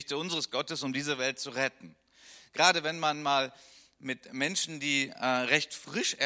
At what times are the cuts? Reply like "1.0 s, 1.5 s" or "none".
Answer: none